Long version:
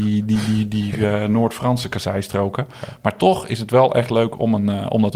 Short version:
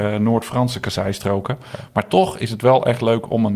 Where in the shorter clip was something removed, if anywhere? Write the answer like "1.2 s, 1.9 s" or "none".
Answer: none